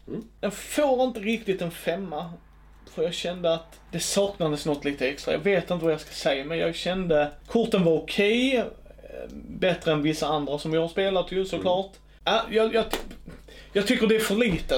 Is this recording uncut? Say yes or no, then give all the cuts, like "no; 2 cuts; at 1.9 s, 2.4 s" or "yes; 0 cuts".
yes; 0 cuts